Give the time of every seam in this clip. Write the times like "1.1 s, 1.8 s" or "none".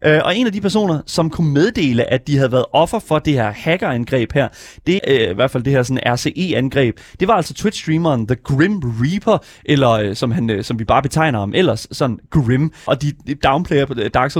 5.0 s, 12.9 s